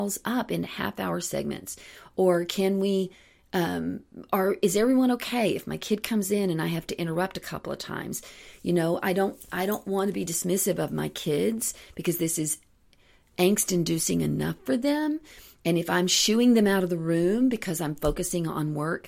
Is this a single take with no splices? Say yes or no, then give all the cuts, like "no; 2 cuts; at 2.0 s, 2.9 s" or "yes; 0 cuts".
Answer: yes; 0 cuts